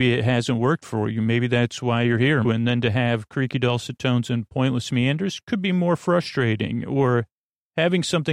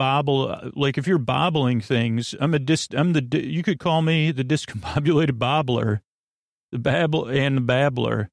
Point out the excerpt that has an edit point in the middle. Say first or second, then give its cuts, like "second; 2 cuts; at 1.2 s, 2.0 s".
first; 1 cut; at 2.4 s